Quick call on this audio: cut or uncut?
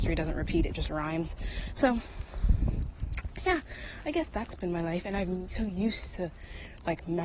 uncut